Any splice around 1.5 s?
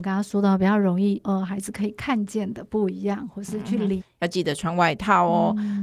no; 1 cut; at 4.0 s

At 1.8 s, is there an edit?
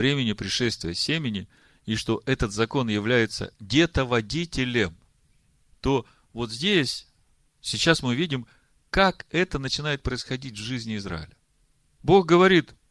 no; 2 cuts; at 5.7 s, 12.0 s

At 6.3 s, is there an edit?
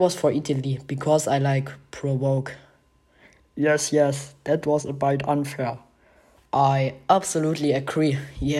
yes; 1 cut; at 6.3 s

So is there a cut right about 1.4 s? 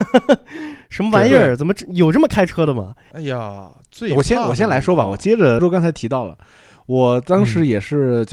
no; 2 cuts; at 3.1 s, 5.6 s

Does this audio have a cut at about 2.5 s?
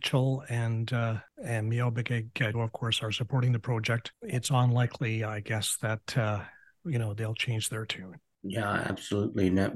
yes; 1 cut; at 2.5 s

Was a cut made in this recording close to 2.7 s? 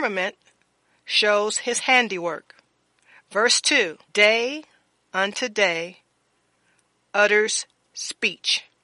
no; 1 cut; at 4.1 s

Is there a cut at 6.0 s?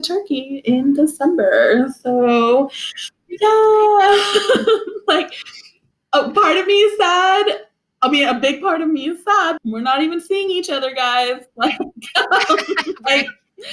no; 1 cut; at 9.6 s

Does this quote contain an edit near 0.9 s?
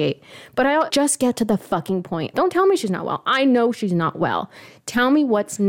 yes; 2 cuts; at 0.9 s, 2.3 s

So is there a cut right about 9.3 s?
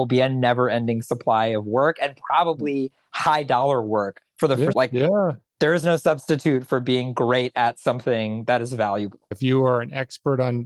yes; 2 cuts; at 4.7 s, 9.3 s

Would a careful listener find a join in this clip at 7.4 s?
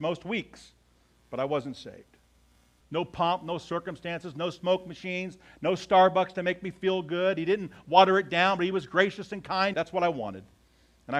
no; 2 cuts; at 2.8 s, 9.7 s

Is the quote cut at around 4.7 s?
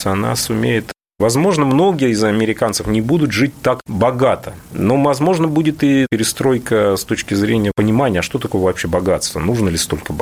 no; 0 cuts

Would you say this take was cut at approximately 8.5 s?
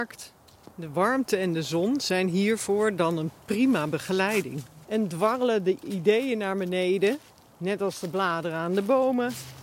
no; 1 cut; at 4.8 s

